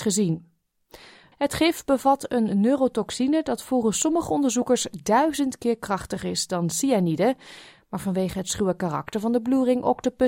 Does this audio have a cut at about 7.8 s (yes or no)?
no